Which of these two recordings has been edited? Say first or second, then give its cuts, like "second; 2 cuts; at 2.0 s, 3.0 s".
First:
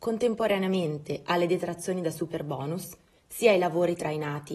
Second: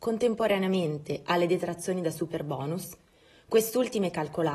first; 1 cut; at 3.2 s